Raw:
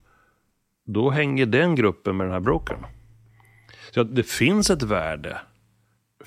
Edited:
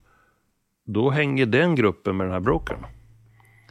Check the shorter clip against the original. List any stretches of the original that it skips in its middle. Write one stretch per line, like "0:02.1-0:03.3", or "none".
none

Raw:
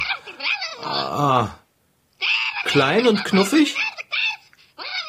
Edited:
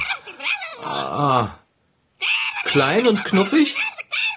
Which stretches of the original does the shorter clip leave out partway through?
none

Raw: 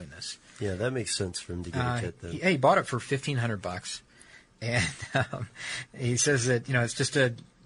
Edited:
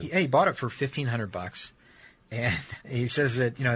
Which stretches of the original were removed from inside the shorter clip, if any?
0:05.1-0:05.9

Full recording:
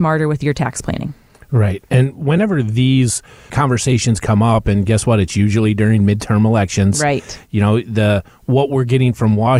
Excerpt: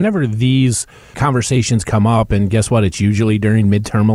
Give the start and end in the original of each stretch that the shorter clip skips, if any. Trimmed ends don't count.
none

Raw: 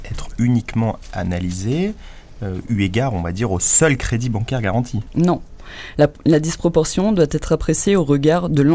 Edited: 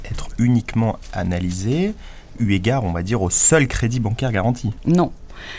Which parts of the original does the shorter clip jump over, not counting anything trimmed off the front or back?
0:02.3-0:02.6

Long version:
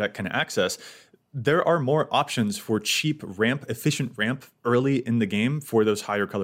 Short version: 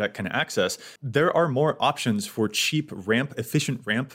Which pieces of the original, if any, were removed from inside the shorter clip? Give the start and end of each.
0:01.0-0:01.3

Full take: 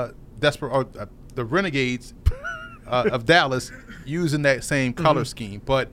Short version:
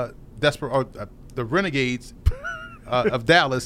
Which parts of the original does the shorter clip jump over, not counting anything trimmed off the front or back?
none

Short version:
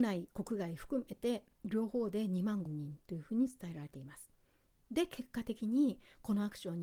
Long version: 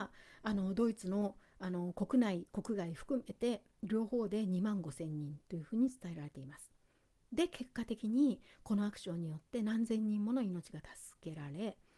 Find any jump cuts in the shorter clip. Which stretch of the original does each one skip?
0:04.8-0:05.1

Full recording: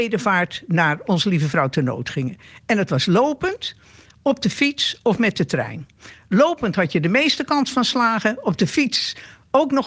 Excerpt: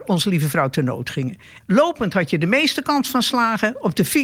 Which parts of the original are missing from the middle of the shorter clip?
0:02.6-0:06.2

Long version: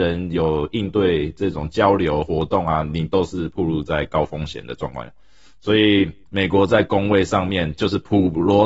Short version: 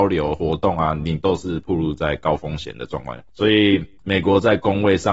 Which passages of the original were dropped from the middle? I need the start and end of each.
0:05.2-0:05.6

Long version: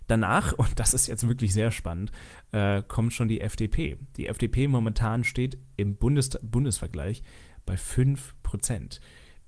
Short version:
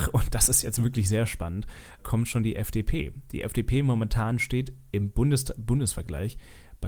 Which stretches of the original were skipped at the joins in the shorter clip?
0:02.4-0:02.8

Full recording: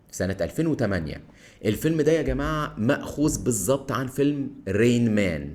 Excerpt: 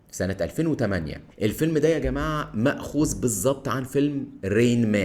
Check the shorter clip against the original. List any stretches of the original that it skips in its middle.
0:01.3-0:01.5

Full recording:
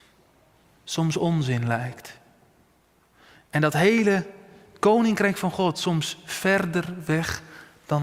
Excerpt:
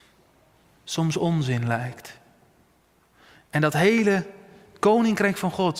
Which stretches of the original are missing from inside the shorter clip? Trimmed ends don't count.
none

